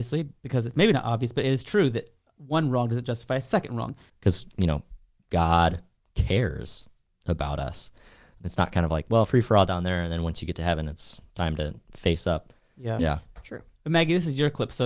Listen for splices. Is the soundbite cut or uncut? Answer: cut